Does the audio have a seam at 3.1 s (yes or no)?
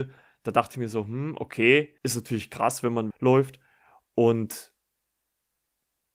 yes